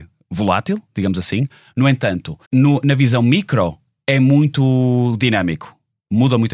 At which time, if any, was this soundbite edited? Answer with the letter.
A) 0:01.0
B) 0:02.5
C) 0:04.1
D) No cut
B